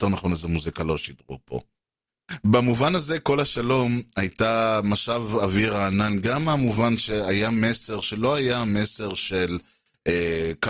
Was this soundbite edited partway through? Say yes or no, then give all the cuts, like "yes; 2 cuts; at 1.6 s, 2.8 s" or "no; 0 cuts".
no; 0 cuts